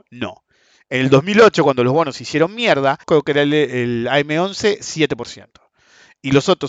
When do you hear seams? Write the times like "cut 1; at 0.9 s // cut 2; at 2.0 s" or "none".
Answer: cut 1; at 3.0 s